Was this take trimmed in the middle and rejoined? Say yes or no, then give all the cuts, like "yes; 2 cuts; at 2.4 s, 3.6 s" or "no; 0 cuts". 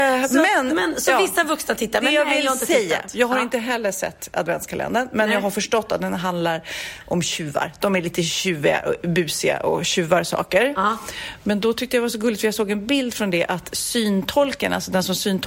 no; 0 cuts